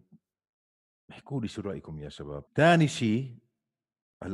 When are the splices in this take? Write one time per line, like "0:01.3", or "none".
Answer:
0:02.5